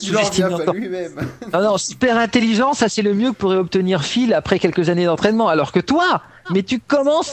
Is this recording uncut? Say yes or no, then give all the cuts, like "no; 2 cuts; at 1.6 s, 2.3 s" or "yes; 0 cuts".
yes; 0 cuts